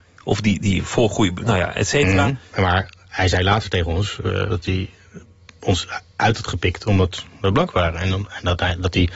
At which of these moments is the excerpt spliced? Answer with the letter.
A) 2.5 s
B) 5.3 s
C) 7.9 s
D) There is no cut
A